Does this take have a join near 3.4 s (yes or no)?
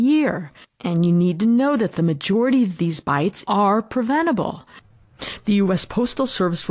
yes